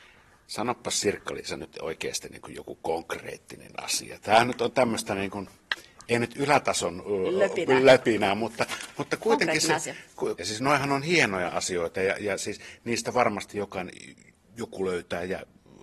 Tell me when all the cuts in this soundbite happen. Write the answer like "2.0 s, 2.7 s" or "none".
10.4 s

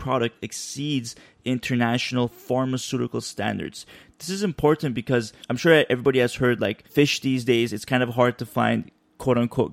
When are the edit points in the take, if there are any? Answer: 5.4 s

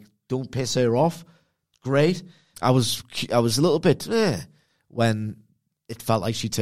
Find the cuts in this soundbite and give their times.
2.5 s

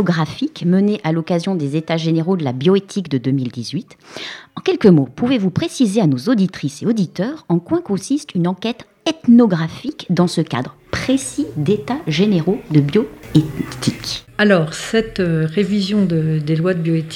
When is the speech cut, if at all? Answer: none

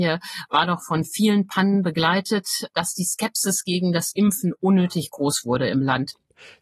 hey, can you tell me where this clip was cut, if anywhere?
2.7 s

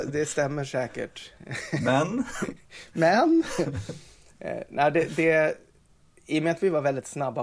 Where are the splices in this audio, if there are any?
none

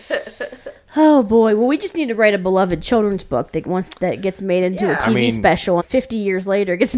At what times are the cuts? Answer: 5.8 s

